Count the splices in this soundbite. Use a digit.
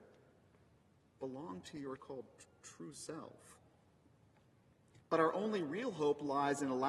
2